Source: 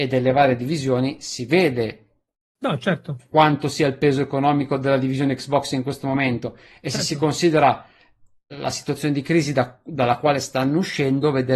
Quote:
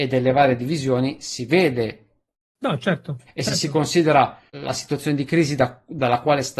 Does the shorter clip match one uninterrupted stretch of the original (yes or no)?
no